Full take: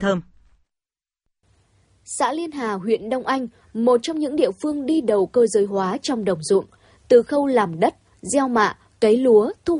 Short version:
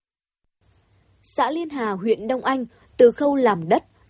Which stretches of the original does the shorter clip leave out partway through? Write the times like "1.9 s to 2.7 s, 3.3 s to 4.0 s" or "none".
3.6 s to 6.9 s